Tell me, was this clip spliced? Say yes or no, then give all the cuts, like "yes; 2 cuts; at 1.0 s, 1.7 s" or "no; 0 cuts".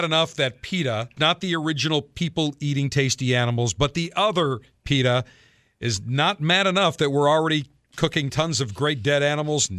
yes; 1 cut; at 1.2 s